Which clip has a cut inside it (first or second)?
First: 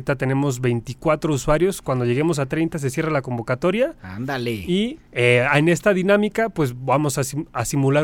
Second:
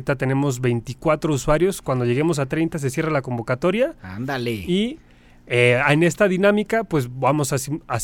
first